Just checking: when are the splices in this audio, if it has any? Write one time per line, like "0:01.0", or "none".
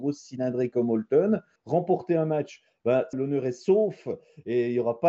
0:01.6
0:03.1

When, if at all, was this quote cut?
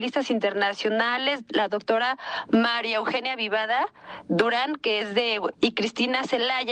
0:05.5

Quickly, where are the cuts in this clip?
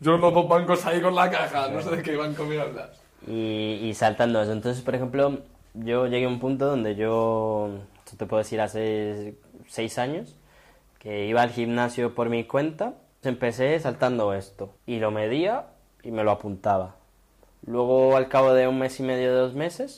0:13.2
0:14.8

